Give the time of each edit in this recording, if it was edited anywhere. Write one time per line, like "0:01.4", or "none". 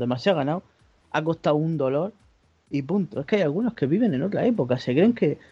none